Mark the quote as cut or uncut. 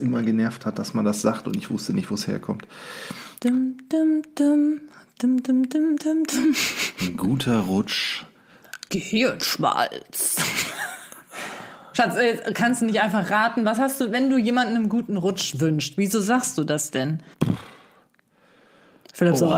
cut